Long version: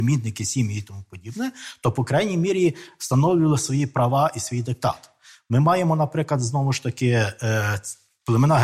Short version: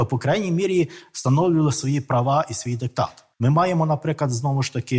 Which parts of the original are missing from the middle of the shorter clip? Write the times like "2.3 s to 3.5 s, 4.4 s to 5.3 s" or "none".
5.2 s to 5.4 s